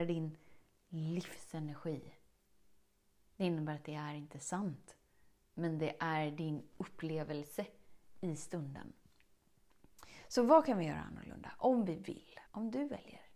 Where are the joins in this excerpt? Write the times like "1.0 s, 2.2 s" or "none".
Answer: 12.5 s